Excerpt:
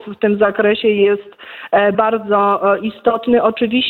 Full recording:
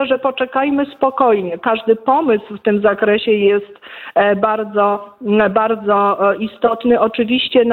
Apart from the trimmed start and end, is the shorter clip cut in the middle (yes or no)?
yes